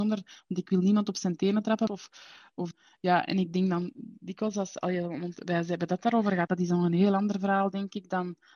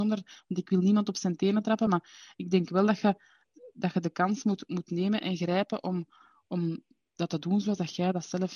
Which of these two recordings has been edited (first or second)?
first